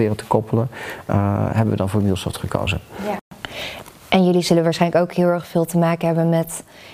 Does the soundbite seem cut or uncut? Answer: uncut